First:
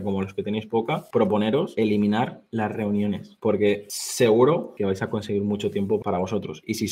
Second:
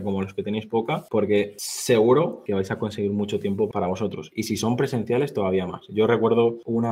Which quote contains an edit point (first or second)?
second